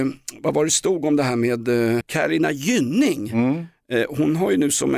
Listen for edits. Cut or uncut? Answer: cut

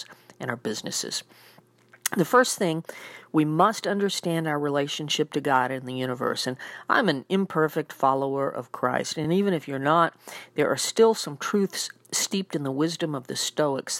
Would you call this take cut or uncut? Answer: uncut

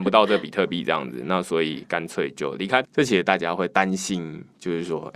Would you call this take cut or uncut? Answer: cut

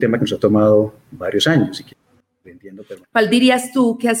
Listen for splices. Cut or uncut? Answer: cut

